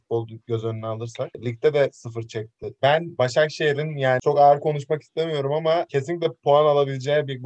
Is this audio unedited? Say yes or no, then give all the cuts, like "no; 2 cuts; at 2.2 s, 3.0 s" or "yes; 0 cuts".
no; 1 cut; at 2.8 s